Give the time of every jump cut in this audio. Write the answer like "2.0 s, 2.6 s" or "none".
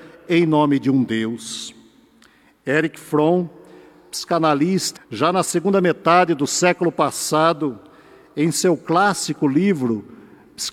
5.0 s